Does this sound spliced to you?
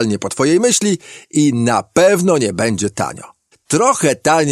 yes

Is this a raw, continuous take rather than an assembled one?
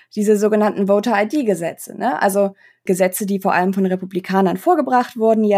yes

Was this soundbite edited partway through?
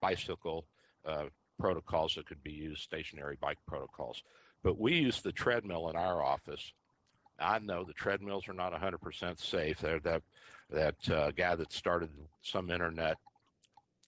yes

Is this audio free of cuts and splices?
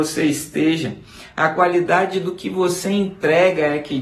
yes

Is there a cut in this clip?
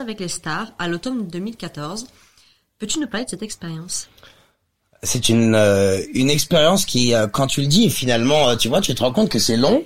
no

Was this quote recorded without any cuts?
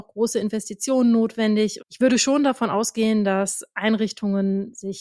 no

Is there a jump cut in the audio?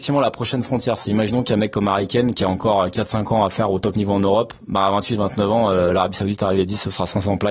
no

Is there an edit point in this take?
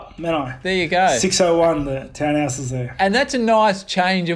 no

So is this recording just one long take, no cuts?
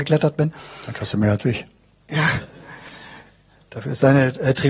yes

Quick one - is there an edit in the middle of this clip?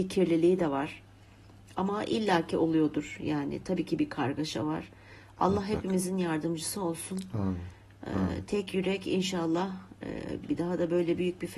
yes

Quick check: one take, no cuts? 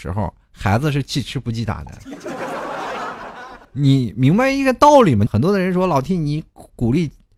no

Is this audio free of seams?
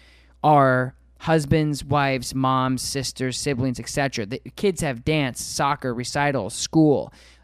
yes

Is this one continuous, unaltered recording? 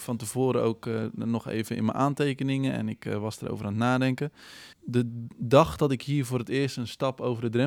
no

